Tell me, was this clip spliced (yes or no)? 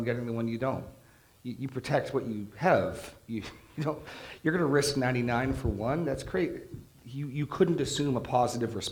no